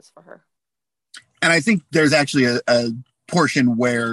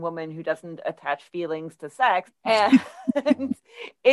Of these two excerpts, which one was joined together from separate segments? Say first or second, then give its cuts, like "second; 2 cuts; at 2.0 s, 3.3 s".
second; 1 cut; at 2.3 s